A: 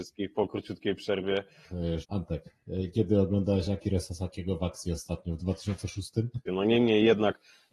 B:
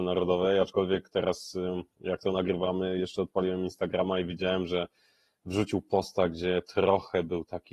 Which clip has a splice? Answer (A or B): A